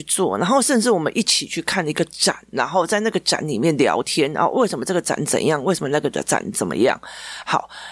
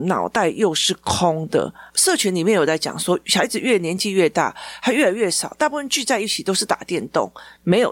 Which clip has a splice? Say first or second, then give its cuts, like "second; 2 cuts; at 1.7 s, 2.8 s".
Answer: second; 1 cut; at 1.9 s